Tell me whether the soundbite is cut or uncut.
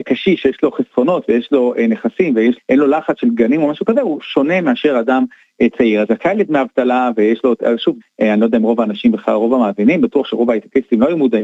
cut